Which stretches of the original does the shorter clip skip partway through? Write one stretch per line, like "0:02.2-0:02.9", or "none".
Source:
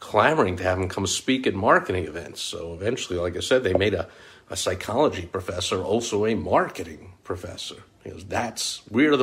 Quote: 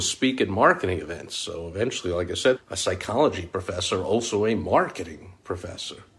0:03.6-0:04.4